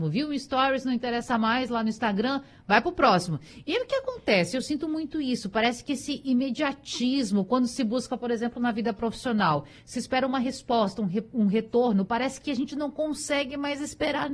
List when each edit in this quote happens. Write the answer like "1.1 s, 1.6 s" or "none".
none